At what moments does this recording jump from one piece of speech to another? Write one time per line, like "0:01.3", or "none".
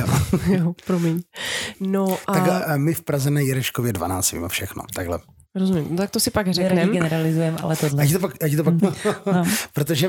0:04.9
0:08.8